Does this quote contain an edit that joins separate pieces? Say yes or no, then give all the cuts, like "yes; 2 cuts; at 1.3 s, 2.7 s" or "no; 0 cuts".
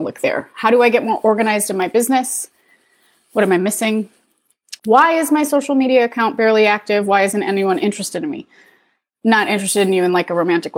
yes; 1 cut; at 4.8 s